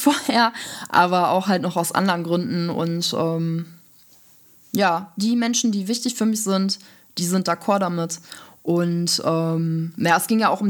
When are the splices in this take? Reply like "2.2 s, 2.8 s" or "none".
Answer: none